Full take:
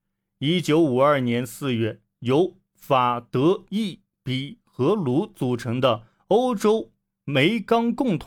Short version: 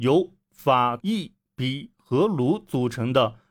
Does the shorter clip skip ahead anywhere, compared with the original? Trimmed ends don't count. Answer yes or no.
yes